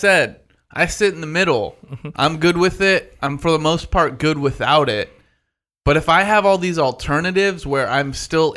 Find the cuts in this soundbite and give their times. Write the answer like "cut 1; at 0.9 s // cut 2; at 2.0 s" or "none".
none